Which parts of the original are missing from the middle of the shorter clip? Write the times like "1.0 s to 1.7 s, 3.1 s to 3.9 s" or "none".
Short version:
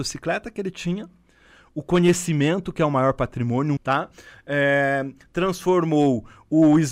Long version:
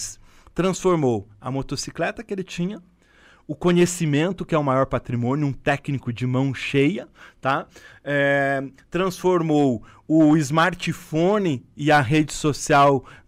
5.5 s to 7.3 s

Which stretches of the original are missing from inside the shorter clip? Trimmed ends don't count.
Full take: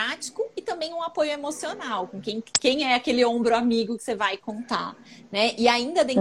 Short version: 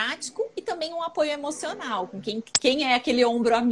none

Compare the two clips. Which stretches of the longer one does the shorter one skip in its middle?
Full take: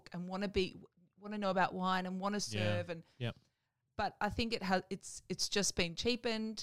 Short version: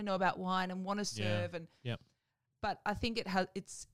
none

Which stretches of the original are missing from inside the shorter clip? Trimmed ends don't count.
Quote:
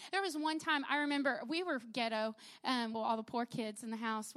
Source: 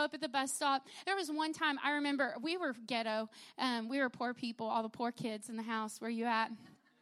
3.9 s to 4.6 s

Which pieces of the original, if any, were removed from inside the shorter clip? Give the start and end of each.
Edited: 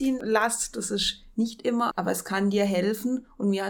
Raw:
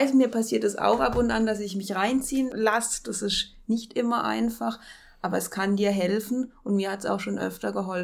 4.2 s to 5.2 s

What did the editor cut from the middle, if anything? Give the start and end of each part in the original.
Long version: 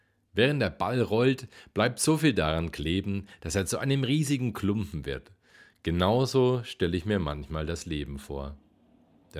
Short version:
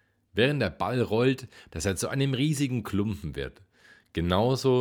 1.7 s to 3.4 s

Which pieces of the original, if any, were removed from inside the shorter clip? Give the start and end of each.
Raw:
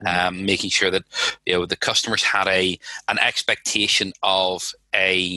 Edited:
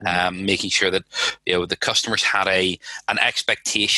none

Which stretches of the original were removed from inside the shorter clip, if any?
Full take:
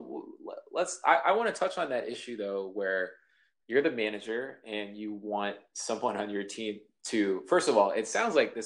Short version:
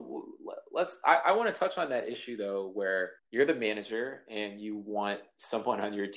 3.2 s to 3.5 s

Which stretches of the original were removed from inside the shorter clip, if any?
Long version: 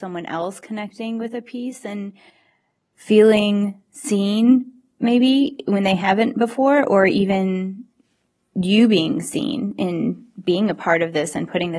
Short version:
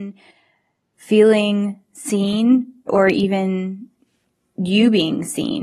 4.9 s to 6.8 s

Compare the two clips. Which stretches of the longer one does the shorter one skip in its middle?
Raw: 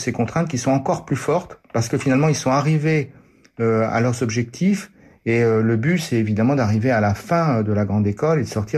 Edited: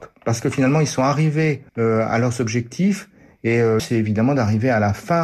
3.2 s to 3.5 s, 5.6 s to 6.0 s

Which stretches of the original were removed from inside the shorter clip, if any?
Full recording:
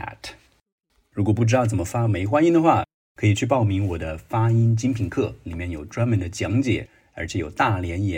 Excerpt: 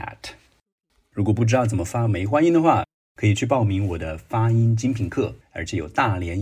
5.4 s to 7.0 s

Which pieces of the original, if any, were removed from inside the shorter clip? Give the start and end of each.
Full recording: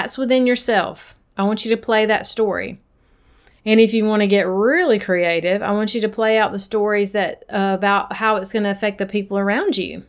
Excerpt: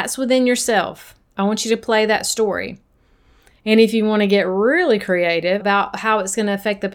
5.6 s to 7.8 s

